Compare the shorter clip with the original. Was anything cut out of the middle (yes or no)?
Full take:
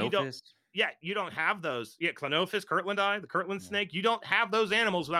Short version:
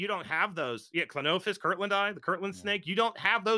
no